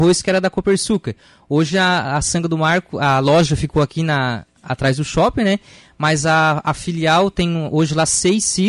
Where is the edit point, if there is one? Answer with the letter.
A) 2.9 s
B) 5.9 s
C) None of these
C